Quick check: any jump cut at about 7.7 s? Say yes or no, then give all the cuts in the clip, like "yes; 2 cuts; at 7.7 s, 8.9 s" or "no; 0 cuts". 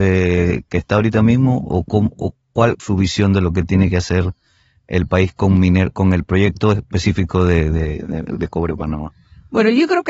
no; 1 cut; at 2.8 s